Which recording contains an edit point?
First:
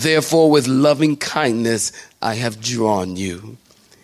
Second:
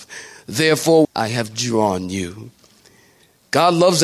second; 1 cut; at 1.0 s

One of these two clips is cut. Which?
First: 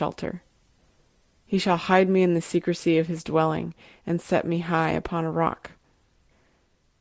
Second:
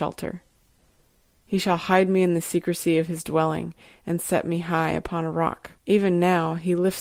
second; 1 cut; at 5.8 s

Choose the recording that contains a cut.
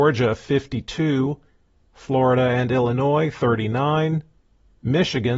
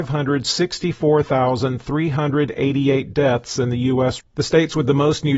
second; 1 cut; at 4.2 s

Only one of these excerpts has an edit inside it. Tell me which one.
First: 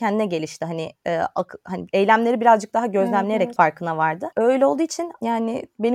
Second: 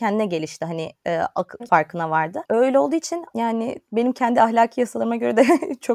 second; 1 cut; at 1.6 s

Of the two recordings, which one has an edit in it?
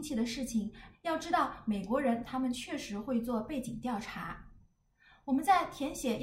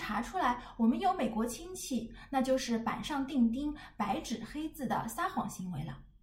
first; 1 cut; at 0.9 s

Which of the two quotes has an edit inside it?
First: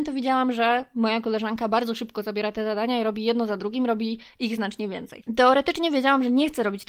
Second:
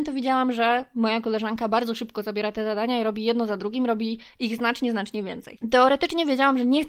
first; 1 cut; at 4.6 s

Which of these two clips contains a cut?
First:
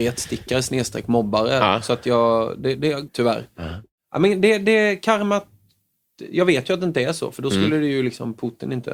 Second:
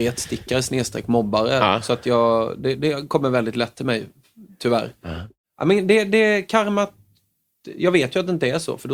first; 1 cut; at 3.1 s

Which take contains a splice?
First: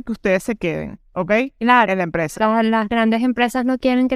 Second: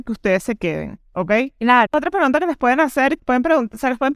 second; 2 cuts; at 1.9 s, 3.2 s

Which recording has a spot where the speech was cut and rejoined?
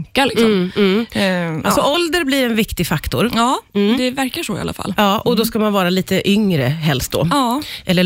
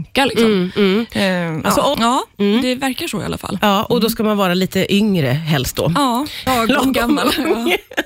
second; 2 cuts; at 1.9 s, 6.5 s

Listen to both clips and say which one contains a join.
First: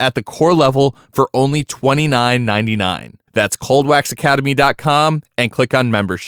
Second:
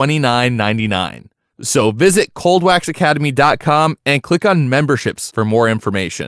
first; 1 cut; at 3.3 s

